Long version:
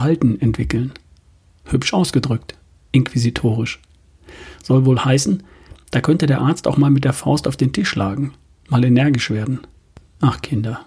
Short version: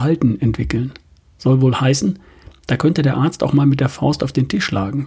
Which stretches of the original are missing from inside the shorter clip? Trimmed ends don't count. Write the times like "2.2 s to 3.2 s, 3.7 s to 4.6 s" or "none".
1.4 s to 4.6 s